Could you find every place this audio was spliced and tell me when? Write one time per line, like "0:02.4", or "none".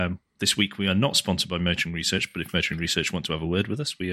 none